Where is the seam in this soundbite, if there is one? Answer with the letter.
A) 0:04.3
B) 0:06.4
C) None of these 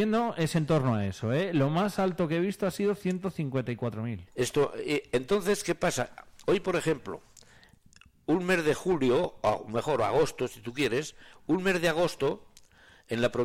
A